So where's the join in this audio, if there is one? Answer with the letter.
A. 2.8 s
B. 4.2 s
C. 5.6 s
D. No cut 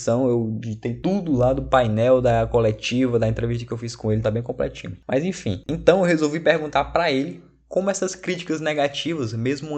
B